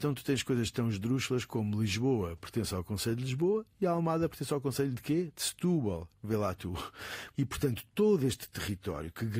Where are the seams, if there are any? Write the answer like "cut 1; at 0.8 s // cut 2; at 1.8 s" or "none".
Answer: cut 1; at 7.3 s

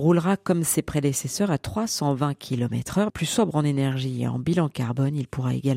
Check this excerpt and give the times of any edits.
cut 1; at 3.1 s

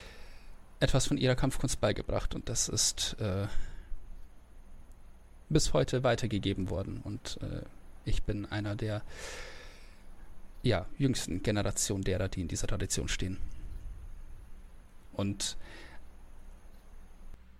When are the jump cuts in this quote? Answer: cut 1; at 15.1 s

